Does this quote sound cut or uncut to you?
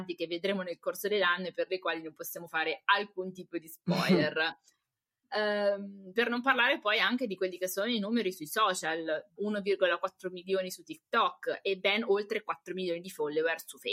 cut